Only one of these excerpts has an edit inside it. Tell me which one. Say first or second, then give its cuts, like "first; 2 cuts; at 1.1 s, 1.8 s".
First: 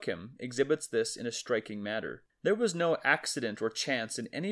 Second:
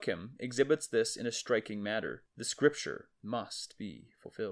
first; 1 cut; at 2.3 s